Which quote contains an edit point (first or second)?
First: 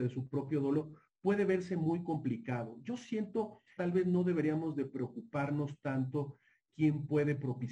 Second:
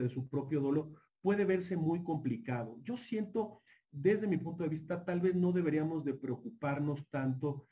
first